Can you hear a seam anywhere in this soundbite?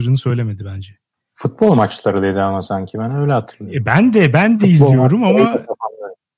no; 0 cuts

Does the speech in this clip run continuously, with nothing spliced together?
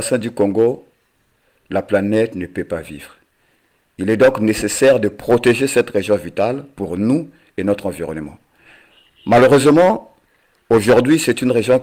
yes; 0 cuts

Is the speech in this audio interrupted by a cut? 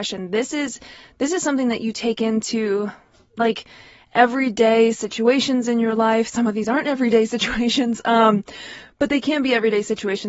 no; 0 cuts

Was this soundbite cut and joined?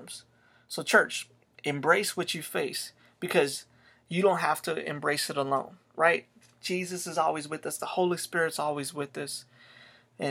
yes; 1 cut; at 7.8 s

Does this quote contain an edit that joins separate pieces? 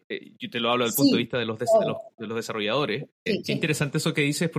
yes; 1 cut; at 3.4 s

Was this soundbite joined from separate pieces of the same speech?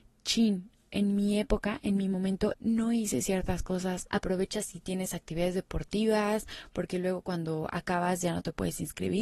yes; 2 cuts; at 2.5 s, 4.1 s

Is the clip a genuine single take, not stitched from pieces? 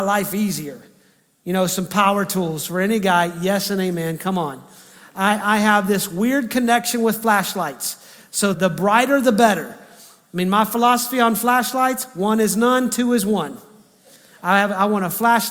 no; 1 cut; at 8.5 s

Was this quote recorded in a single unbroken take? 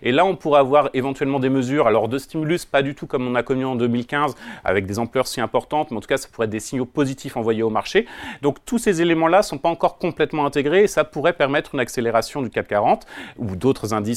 yes; 0 cuts

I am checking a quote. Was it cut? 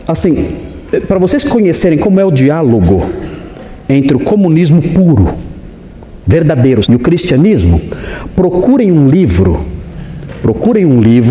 yes; 1 cut; at 6.8 s

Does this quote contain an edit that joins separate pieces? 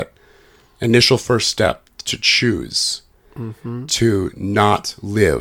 no; 0 cuts

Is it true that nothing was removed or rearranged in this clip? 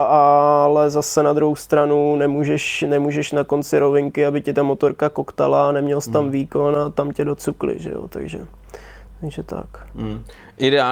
yes; 0 cuts

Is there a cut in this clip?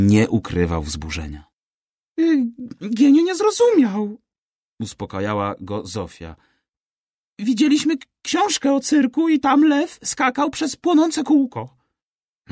no; 0 cuts

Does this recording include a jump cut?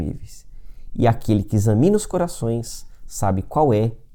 no; 0 cuts

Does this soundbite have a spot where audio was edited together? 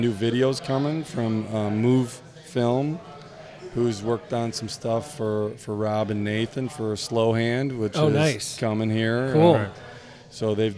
no; 0 cuts

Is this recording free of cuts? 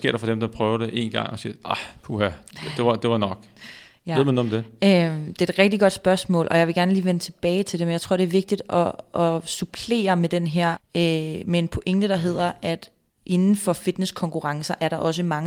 no; 1 cut; at 10.7 s

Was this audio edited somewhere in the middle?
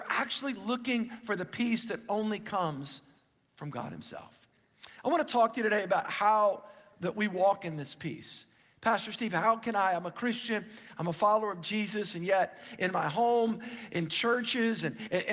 no; 0 cuts

